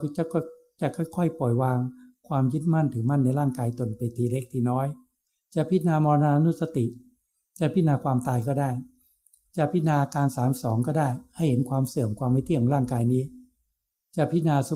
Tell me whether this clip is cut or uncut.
uncut